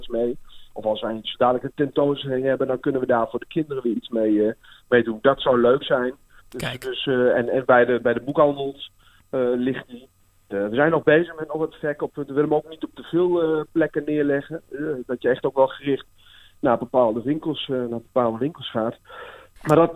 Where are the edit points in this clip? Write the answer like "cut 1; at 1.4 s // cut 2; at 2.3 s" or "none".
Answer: cut 1; at 6.4 s

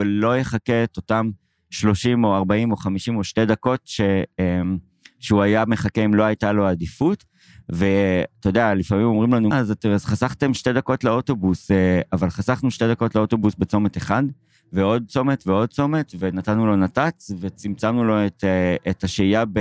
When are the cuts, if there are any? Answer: cut 1; at 9.5 s

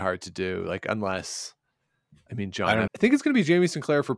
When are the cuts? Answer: cut 1; at 2.9 s

